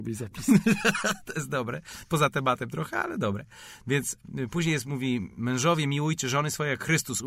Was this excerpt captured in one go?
yes; 0 cuts

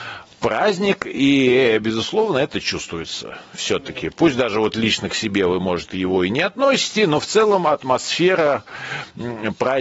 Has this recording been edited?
no; 0 cuts

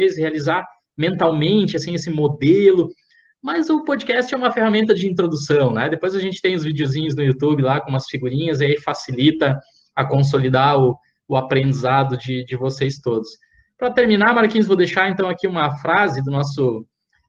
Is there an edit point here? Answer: no; 0 cuts

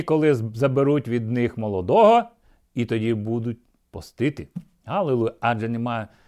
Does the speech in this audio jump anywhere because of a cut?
no; 0 cuts

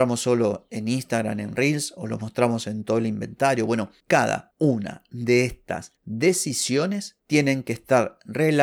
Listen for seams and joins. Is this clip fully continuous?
yes; 0 cuts

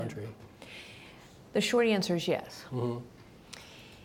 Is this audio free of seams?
yes; 0 cuts

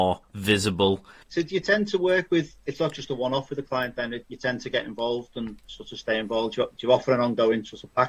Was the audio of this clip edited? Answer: yes; 1 cut; at 1.2 s

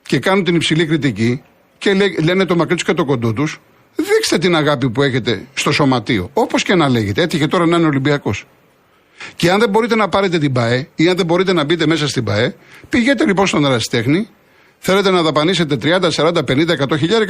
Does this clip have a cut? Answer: no; 0 cuts

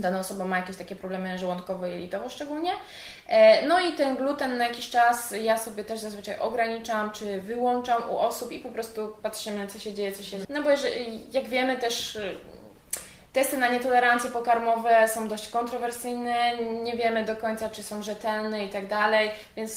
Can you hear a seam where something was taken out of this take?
yes; 1 cut; at 10.4 s

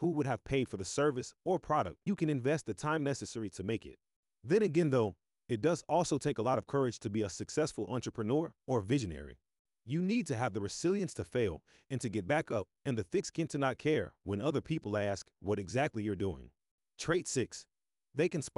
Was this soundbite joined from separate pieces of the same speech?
yes; 1 cut; at 2.1 s

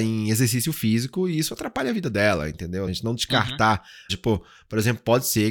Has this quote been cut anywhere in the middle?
yes; 2 cuts; at 2.9 s, 4.1 s

